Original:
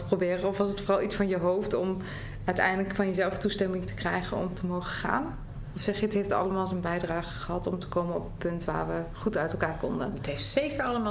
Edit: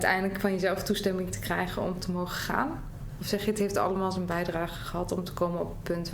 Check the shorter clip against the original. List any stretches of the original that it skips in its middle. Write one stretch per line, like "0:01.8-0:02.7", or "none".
none